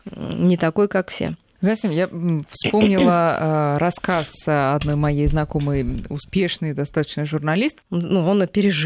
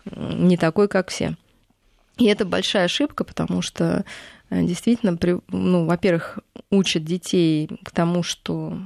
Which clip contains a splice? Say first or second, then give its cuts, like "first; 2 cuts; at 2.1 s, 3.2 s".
first; 2 cuts; at 1.6 s, 7.8 s